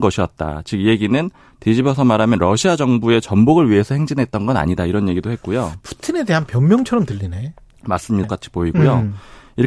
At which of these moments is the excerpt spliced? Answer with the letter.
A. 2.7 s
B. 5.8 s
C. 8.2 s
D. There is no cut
C